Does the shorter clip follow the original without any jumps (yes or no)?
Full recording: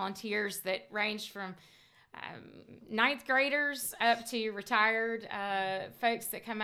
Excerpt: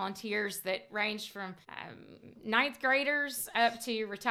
no